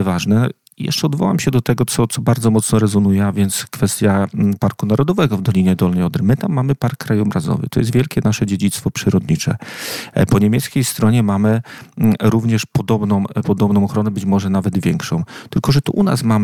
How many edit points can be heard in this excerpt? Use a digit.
0